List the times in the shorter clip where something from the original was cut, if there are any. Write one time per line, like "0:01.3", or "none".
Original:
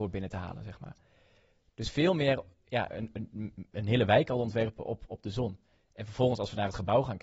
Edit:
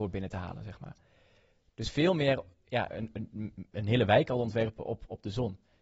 none